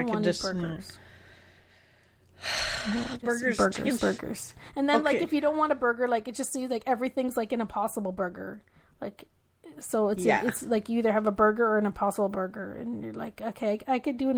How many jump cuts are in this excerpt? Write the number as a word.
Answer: one